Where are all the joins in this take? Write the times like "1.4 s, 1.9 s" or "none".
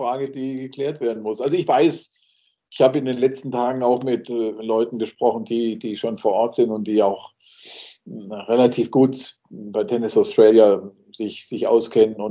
none